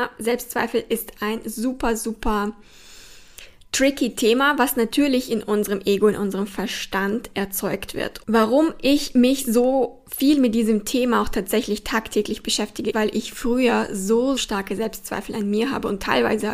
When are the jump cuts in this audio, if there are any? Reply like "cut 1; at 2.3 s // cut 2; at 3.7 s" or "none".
cut 1; at 8.2 s // cut 2; at 12.9 s // cut 3; at 14.4 s